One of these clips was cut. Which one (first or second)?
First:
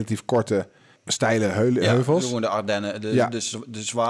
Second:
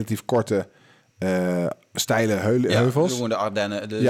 first